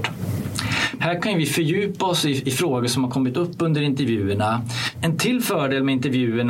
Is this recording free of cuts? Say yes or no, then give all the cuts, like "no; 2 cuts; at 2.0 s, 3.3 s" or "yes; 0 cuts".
no; 2 cuts; at 1.0 s, 4.9 s